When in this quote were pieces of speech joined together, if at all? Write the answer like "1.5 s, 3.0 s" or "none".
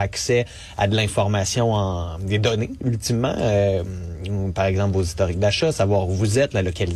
none